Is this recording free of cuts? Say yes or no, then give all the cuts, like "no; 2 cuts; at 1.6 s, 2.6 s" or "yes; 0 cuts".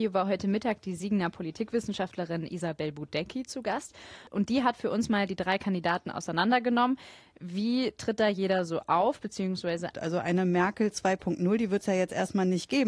no; 1 cut; at 9.9 s